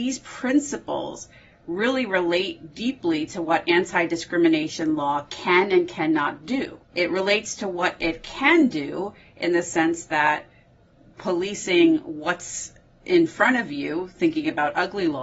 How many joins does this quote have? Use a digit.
1